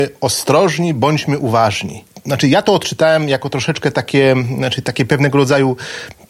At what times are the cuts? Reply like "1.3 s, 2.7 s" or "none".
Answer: none

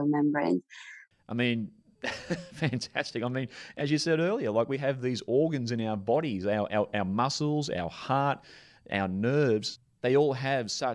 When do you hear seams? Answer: 1.1 s

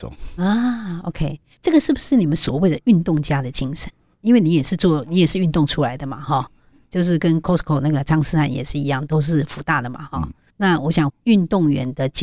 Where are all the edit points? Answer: none

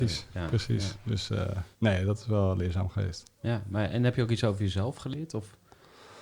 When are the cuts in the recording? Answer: 1.7 s

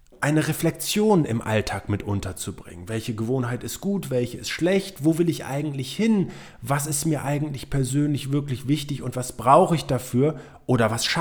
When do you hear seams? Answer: none

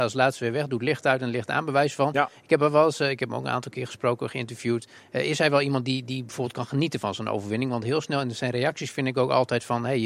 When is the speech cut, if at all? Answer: none

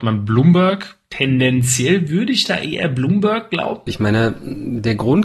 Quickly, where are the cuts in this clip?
3.9 s

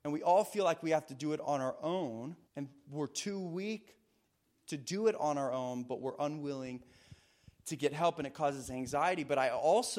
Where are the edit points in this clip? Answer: 2.5 s

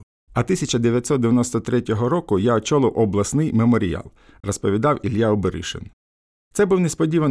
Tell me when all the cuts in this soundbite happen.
none

